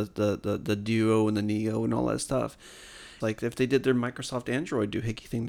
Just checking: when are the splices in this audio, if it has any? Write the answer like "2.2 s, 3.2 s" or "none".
3.2 s